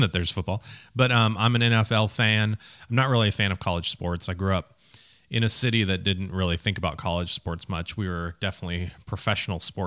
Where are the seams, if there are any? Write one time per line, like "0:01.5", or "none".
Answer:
none